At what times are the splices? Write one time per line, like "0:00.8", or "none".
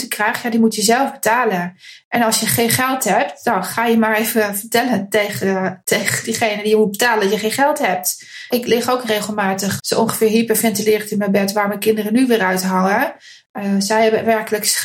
0:08.5
0:09.8